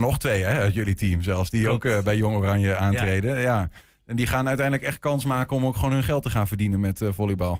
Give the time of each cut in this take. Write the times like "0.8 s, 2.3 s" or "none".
none

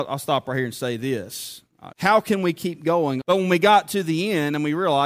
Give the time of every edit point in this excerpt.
1.9 s, 3.2 s

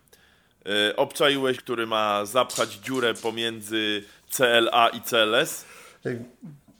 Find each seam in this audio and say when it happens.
1.5 s

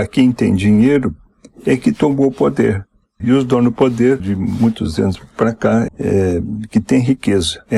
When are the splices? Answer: 3.2 s, 4.2 s, 5.9 s

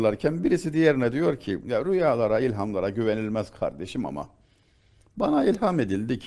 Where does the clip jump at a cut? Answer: none

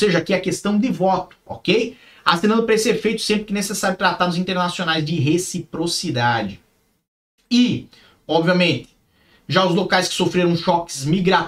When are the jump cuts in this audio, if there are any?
none

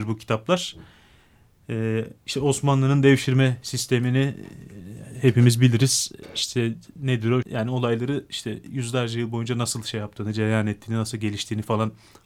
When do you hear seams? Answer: 7.4 s

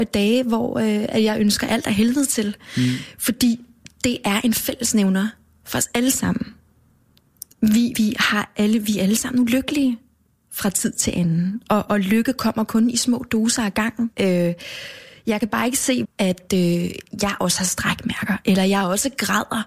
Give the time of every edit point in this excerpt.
7.9 s, 14.1 s, 16.0 s

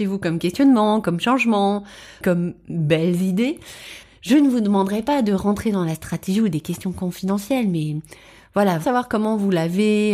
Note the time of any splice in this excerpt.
8.8 s

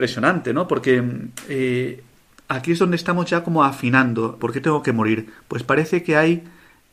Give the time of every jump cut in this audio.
4.4 s

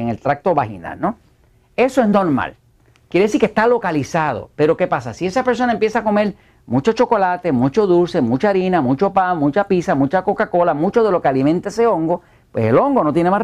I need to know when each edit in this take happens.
none

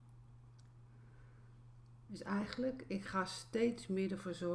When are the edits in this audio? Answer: 2.1 s

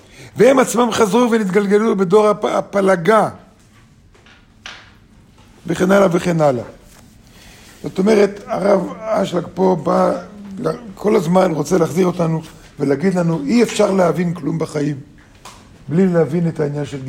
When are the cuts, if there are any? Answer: none

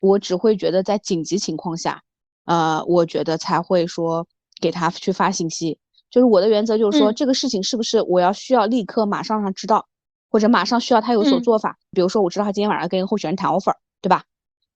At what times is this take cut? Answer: 11.9 s

